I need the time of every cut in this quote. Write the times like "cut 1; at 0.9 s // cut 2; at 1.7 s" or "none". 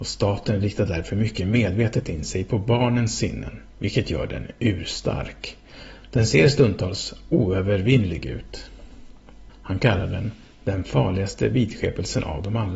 cut 1; at 3.7 s // cut 2; at 9.5 s